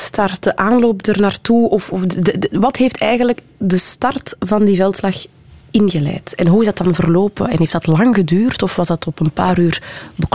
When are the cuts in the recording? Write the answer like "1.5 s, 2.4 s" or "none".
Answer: none